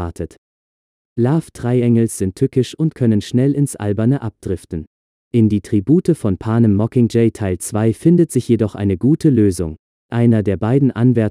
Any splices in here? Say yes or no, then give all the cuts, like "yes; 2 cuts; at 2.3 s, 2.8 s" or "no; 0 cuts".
yes; 1 cut; at 9.9 s